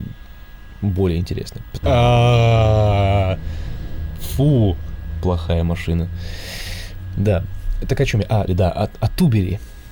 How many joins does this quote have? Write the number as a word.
two